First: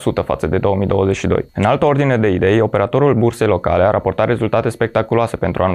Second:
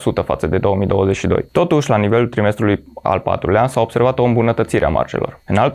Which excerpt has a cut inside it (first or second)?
first